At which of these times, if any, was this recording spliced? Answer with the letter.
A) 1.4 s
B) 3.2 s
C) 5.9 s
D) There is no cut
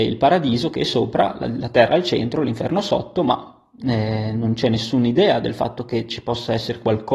D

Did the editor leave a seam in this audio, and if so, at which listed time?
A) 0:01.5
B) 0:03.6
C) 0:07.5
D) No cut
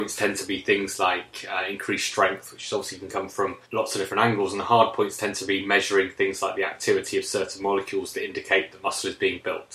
B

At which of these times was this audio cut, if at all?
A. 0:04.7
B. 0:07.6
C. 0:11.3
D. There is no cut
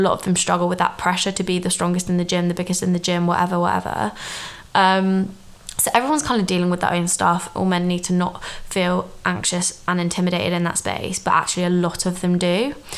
B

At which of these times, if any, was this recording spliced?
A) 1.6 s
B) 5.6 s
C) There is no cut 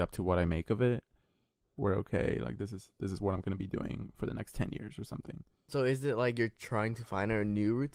A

